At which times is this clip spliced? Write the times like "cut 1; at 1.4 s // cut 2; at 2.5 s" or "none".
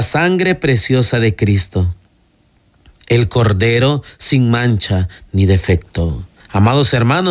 cut 1; at 6.4 s